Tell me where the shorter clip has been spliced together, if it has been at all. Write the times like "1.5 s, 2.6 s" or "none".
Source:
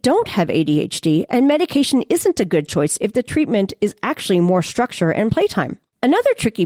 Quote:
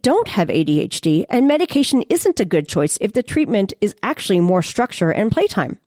none